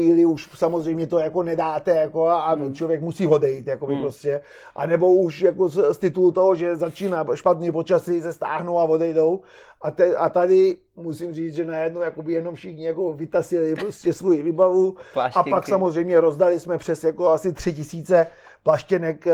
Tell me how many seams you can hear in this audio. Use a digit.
0